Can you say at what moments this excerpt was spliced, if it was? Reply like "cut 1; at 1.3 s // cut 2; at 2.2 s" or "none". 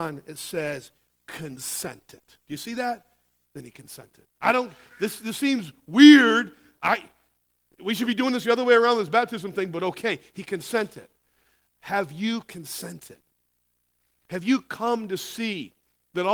none